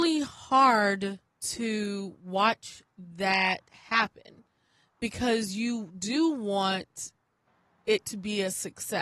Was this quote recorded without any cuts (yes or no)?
no